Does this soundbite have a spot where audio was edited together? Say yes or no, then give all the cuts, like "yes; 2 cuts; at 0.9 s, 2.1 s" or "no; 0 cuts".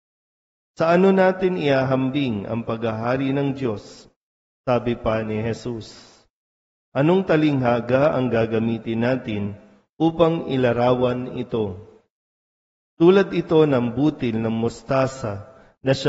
no; 0 cuts